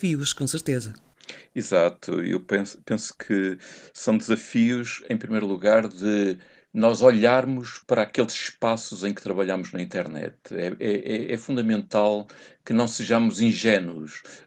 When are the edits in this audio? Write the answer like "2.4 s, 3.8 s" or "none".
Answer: none